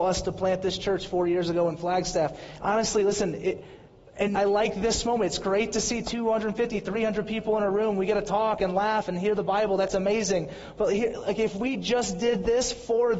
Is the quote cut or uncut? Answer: cut